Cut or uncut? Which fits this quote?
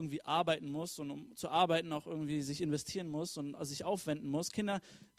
uncut